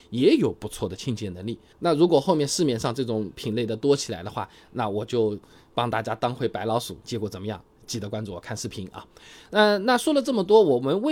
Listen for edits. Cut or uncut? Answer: cut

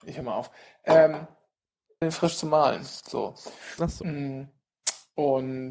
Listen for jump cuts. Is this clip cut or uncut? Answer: cut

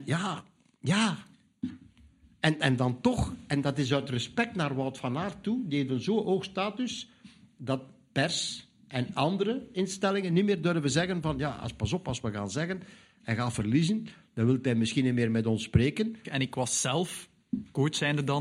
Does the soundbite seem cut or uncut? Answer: cut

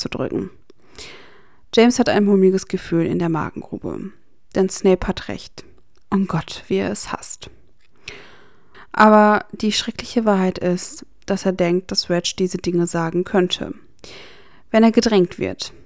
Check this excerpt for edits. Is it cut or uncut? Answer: cut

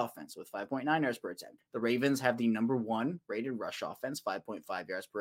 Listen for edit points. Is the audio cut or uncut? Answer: cut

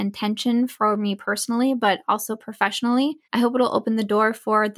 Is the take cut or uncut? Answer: cut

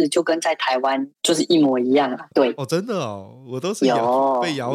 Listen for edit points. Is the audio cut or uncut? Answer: cut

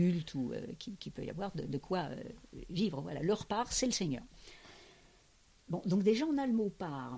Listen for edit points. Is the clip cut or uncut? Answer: uncut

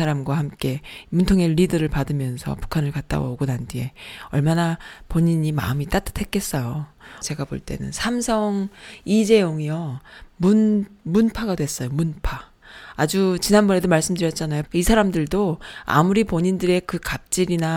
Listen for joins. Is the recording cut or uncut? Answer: cut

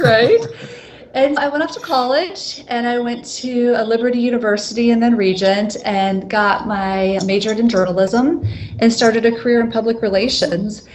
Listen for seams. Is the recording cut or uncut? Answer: cut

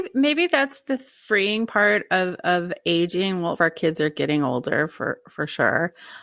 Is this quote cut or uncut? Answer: cut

